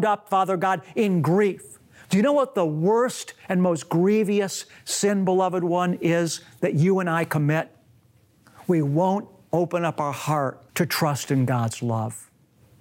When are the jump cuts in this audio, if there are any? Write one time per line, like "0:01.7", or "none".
0:02.0
0:10.7